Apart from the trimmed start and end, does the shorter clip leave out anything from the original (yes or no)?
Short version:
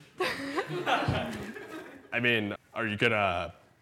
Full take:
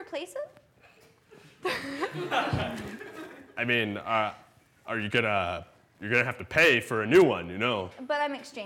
yes